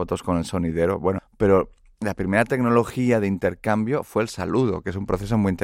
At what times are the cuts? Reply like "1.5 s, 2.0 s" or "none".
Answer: 1.2 s